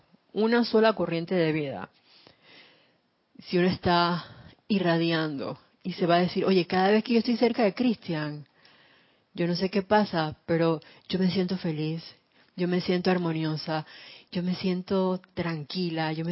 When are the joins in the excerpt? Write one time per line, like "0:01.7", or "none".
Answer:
none